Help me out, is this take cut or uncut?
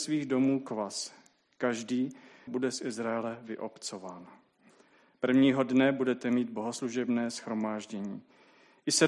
cut